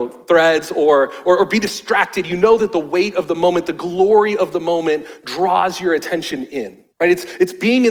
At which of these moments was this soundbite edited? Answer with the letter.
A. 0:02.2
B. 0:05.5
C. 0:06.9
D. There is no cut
C